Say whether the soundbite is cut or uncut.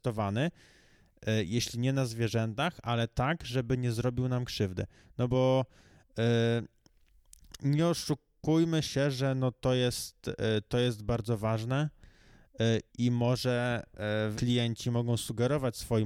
cut